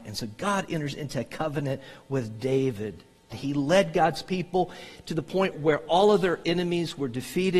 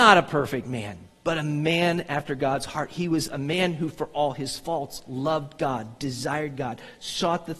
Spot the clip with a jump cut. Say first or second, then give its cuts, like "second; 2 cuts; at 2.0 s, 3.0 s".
first; 2 cuts; at 3.3 s, 5.5 s